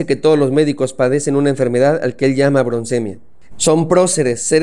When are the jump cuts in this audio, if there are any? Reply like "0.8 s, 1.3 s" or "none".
3.5 s